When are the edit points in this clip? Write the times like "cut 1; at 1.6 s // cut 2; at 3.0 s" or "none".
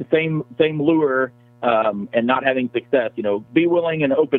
cut 1; at 3.5 s